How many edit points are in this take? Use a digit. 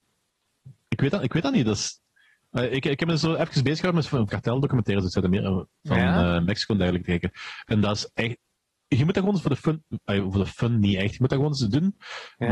1